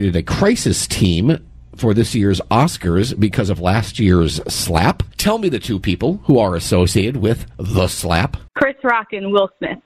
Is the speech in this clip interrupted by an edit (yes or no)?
yes